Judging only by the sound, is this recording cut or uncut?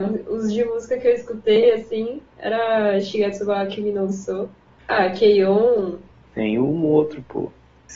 uncut